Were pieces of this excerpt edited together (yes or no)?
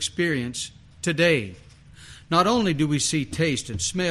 no